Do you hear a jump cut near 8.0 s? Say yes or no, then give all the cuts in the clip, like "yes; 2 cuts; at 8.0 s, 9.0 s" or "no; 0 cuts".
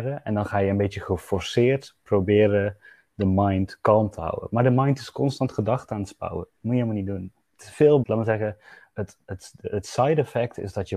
yes; 1 cut; at 8.0 s